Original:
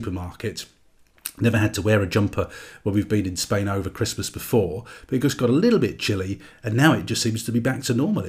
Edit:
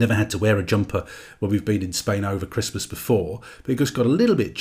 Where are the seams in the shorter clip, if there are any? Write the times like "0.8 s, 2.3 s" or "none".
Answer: none